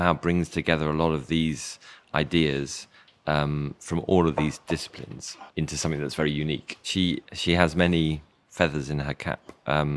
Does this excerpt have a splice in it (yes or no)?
yes